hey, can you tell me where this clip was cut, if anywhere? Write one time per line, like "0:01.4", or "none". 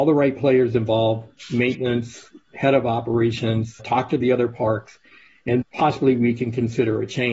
0:03.8
0:05.6